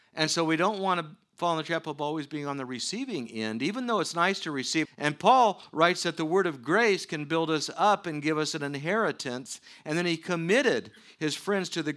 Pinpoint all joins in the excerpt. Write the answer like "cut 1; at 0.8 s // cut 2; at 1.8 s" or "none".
cut 1; at 4.9 s